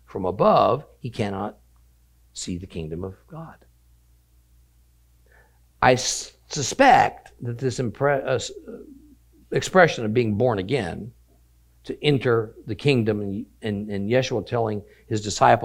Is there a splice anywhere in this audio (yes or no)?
no